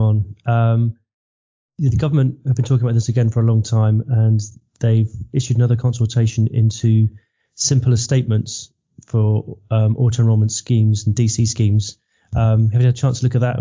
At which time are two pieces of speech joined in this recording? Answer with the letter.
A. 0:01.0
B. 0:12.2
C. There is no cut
C